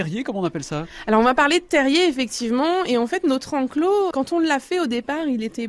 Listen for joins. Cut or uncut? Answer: cut